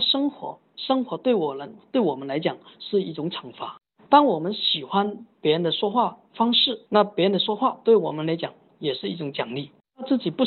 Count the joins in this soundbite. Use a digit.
2